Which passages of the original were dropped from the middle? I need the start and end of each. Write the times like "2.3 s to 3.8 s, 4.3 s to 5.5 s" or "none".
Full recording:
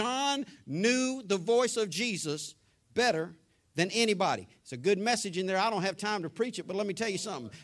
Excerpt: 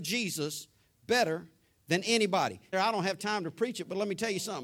4.6 s to 5.5 s